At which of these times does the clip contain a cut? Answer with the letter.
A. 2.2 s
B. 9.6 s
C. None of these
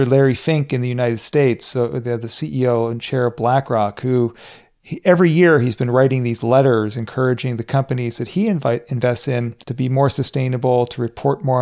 B